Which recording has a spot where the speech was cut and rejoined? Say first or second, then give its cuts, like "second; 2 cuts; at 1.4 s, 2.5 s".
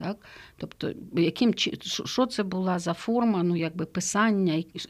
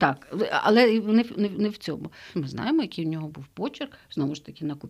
second; 1 cut; at 2.3 s